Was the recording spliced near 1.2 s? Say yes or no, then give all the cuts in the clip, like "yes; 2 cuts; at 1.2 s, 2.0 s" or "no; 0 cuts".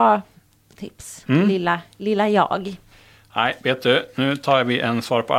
no; 0 cuts